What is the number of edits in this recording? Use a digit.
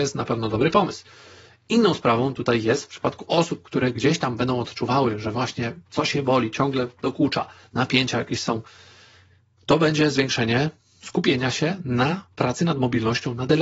0